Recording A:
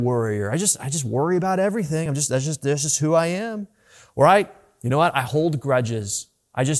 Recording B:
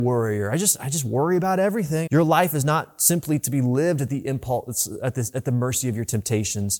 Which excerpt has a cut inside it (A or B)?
B